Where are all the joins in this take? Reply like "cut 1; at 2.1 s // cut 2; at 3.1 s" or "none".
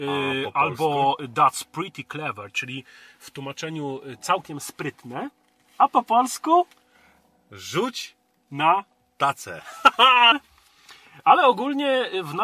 cut 1; at 10.3 s